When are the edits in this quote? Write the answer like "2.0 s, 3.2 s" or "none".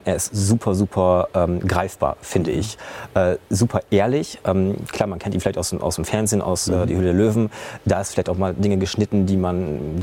none